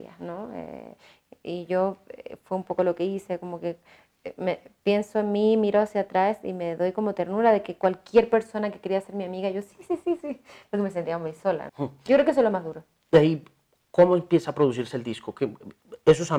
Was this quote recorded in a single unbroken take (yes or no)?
no